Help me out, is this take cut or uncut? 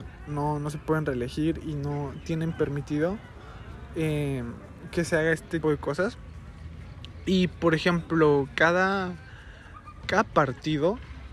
cut